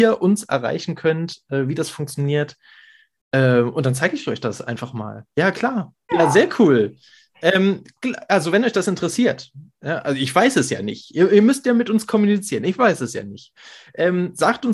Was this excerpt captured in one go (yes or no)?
no